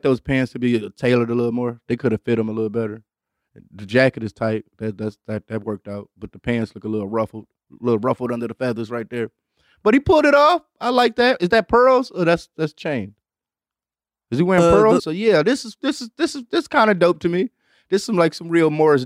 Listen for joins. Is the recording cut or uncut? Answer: cut